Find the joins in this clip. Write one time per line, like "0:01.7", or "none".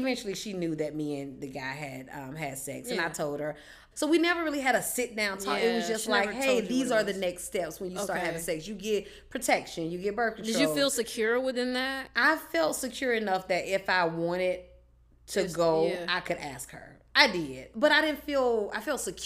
0:03.9